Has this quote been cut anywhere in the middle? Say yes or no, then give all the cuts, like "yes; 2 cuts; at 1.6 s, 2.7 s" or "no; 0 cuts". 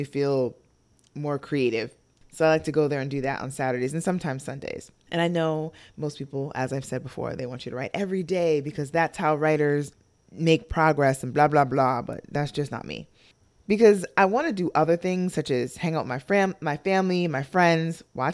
no; 0 cuts